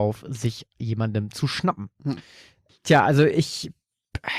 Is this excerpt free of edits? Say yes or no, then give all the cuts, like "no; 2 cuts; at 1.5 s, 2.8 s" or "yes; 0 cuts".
yes; 0 cuts